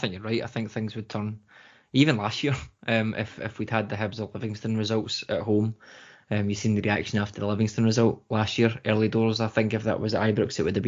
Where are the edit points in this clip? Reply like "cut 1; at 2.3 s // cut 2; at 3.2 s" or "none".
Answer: none

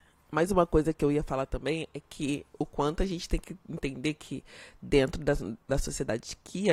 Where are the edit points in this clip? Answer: none

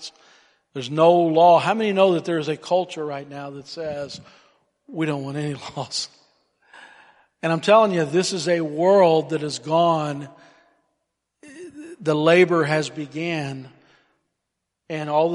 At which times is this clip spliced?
none

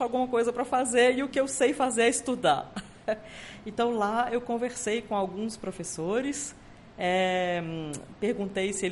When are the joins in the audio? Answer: none

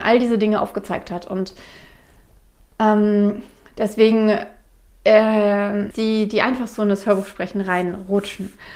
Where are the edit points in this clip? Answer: cut 1; at 5.9 s

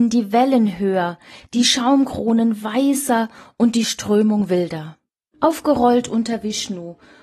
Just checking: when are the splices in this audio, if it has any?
cut 1; at 5.3 s

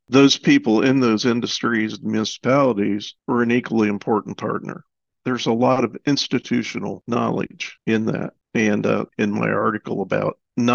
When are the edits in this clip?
cut 1; at 5.1 s // cut 2; at 9.1 s

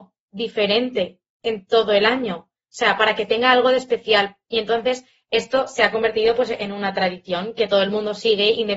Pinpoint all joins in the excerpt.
none

